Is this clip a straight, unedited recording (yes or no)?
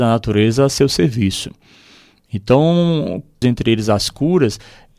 no